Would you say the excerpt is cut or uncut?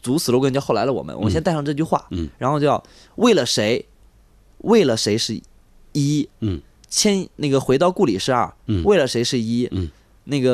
uncut